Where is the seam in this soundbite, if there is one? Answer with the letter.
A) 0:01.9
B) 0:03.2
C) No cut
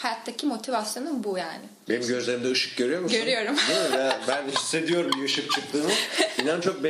A